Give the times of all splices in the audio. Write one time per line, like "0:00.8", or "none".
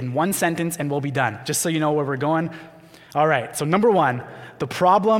none